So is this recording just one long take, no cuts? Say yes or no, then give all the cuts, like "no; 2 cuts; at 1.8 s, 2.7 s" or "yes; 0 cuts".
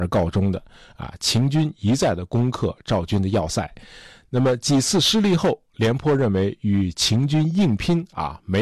yes; 0 cuts